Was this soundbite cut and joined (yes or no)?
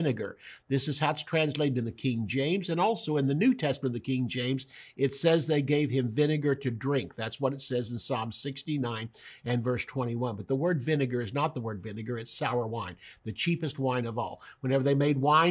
no